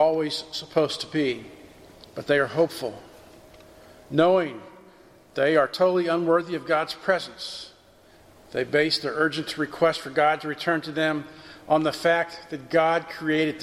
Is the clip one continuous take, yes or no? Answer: no